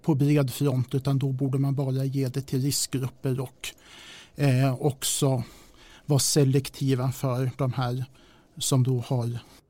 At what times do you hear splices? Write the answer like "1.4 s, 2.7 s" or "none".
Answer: none